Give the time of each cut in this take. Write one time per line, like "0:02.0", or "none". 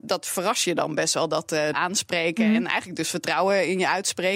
0:01.7